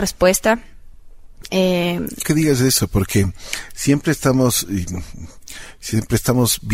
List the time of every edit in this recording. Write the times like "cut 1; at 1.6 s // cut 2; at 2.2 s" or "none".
cut 1; at 2.2 s